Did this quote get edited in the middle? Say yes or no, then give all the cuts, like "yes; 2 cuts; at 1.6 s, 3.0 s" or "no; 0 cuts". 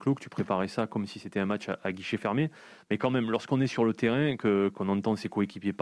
no; 0 cuts